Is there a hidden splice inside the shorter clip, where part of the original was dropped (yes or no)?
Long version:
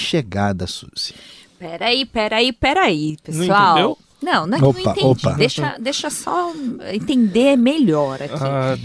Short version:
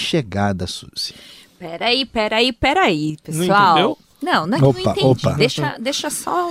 no